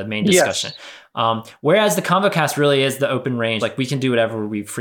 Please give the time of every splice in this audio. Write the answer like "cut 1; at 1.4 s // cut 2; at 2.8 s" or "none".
cut 1; at 3.6 s